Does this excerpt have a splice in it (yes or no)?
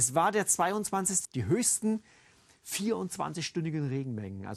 yes